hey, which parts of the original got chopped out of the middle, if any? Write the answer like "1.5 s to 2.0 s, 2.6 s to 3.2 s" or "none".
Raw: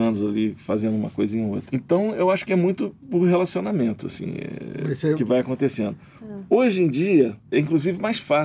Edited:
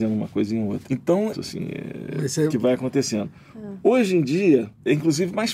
2.1 s to 4.0 s